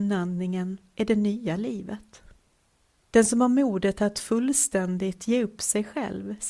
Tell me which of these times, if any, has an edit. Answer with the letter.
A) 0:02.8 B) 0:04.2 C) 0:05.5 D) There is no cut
D